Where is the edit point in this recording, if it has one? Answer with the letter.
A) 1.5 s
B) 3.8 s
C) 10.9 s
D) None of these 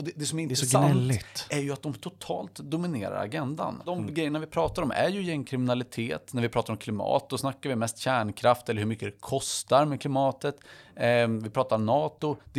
D